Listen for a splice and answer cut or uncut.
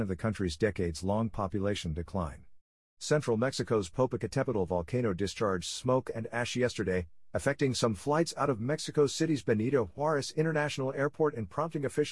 cut